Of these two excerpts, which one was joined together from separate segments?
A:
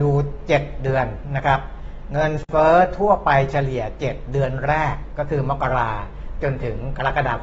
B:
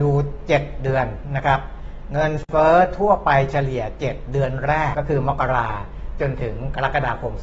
B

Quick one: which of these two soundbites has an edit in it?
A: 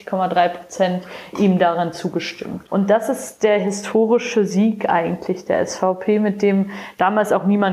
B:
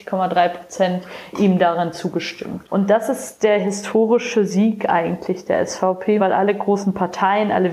B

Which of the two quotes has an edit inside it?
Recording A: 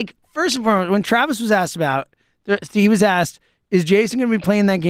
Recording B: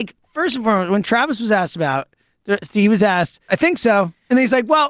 B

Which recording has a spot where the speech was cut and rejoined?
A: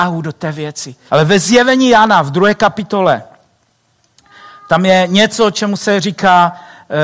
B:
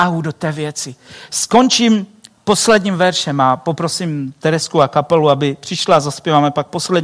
A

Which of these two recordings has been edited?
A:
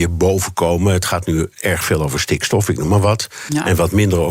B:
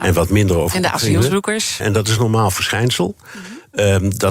B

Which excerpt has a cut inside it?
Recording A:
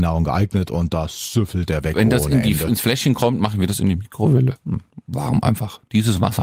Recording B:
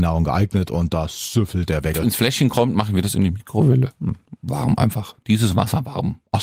B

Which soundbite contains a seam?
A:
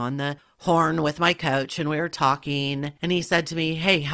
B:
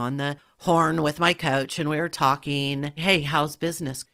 B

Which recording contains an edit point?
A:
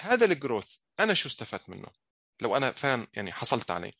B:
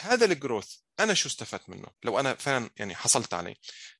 B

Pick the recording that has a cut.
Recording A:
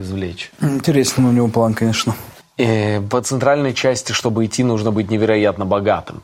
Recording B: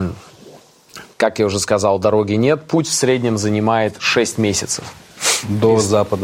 A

